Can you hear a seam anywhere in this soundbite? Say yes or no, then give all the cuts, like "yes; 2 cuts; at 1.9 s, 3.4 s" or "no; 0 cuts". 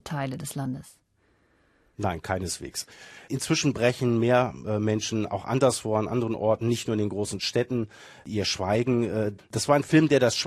yes; 1 cut; at 9.4 s